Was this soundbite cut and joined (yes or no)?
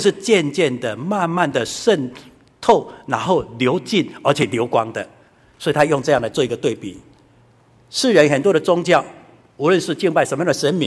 no